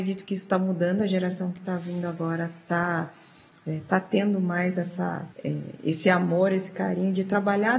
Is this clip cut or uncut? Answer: cut